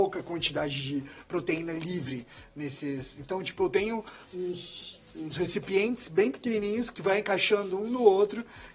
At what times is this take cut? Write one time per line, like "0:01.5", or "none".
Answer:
0:04.2